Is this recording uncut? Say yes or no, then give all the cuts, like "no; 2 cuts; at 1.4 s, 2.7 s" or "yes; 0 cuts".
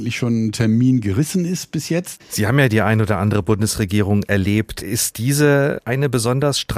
no; 1 cut; at 2.2 s